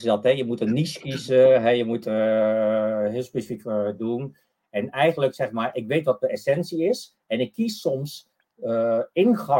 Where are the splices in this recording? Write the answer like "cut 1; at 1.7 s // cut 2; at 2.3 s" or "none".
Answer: none

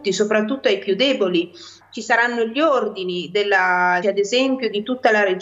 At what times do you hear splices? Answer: cut 1; at 1.8 s // cut 2; at 4.0 s

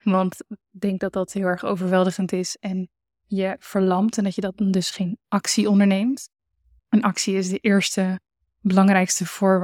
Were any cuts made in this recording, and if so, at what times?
none

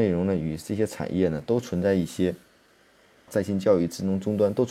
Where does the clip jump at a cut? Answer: cut 1; at 3.3 s

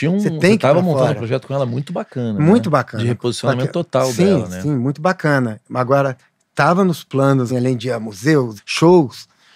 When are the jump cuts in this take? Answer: cut 1; at 7.5 s // cut 2; at 8.6 s

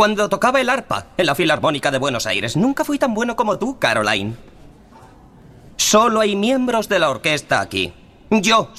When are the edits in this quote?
none

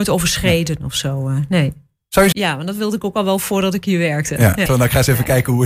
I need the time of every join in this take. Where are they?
cut 1; at 2.3 s // cut 2; at 4.7 s

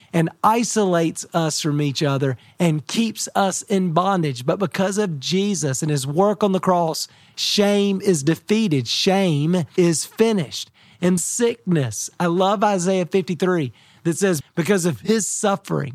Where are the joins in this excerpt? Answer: cut 1; at 11.2 s // cut 2; at 14.4 s

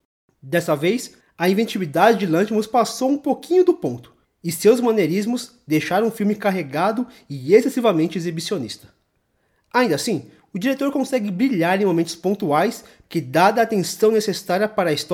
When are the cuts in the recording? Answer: cut 1; at 13.0 s

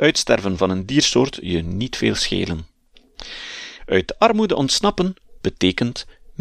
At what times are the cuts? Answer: cut 1; at 3.8 s

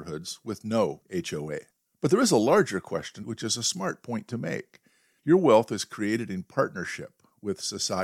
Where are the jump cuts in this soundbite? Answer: cut 1; at 3.2 s // cut 2; at 5.2 s

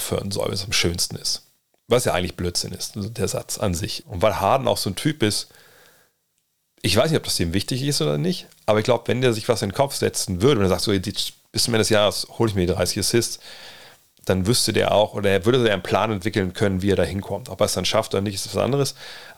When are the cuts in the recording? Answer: cut 1; at 4.0 s

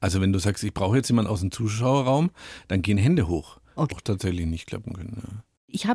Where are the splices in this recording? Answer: cut 1; at 3.9 s

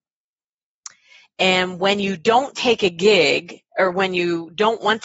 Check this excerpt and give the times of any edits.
none

